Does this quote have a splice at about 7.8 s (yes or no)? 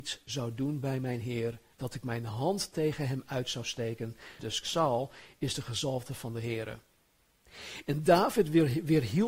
no